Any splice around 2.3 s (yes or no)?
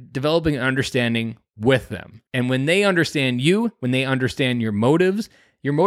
yes